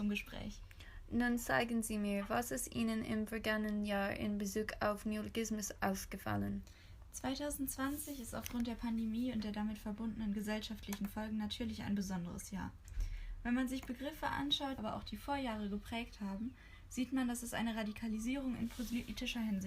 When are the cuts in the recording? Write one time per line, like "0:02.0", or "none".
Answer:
0:14.8

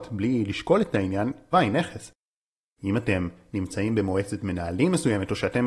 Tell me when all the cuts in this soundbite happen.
0:01.5

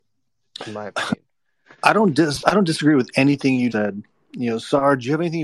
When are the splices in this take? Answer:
0:03.7

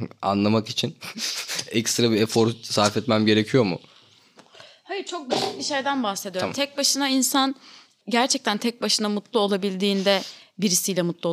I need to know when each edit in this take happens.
0:08.0

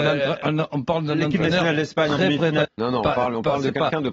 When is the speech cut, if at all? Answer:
0:02.6

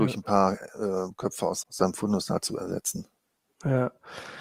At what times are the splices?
0:01.6

